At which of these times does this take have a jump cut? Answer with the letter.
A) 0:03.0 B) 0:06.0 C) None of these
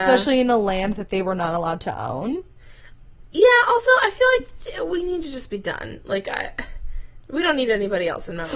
C